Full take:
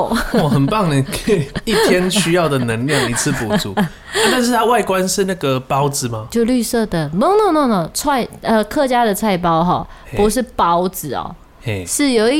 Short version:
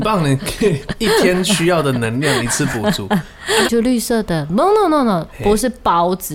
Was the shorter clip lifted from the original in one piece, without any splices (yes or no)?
no